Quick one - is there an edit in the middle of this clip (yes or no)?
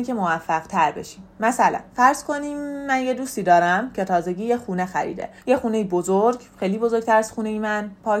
yes